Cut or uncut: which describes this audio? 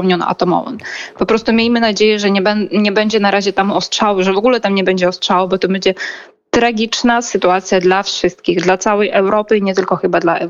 uncut